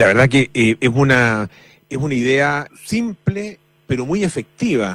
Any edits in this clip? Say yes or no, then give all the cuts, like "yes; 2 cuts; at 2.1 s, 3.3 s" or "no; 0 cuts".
yes; 1 cut; at 2.7 s